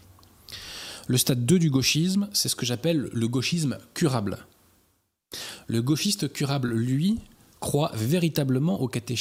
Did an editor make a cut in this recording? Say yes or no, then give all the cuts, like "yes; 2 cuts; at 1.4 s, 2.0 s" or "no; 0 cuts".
no; 0 cuts